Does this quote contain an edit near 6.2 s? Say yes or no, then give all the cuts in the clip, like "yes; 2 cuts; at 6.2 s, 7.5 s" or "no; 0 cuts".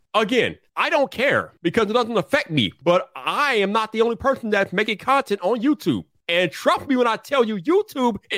yes; 1 cut; at 6.2 s